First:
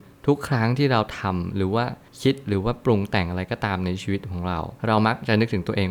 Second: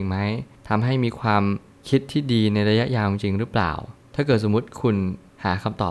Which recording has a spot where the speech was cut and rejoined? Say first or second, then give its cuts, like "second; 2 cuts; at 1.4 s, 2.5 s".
first; 1 cut; at 4.8 s